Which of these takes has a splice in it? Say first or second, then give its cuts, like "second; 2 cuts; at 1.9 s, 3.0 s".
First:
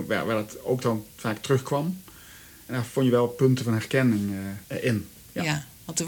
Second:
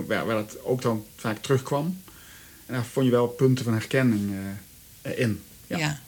first; 1 cut; at 4.6 s